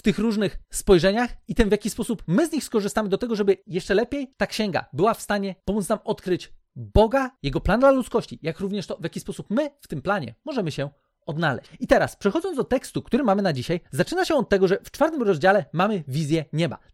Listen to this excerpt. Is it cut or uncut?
uncut